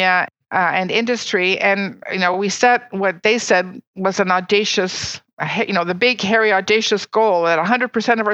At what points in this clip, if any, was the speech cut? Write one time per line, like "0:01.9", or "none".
none